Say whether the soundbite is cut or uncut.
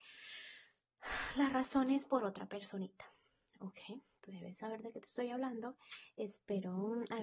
uncut